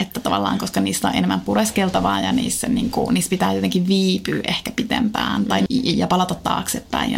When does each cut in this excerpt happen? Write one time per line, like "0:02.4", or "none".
0:05.7